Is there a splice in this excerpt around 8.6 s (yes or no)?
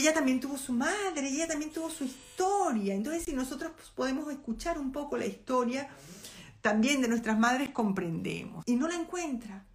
yes